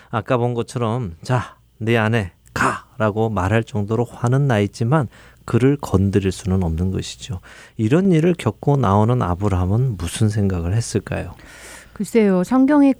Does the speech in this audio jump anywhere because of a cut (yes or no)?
no